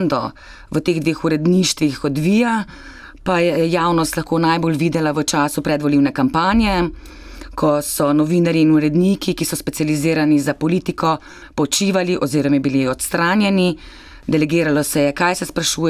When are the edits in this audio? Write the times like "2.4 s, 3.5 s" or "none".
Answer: none